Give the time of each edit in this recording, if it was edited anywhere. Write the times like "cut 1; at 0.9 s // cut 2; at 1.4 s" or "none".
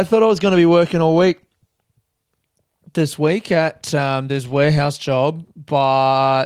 none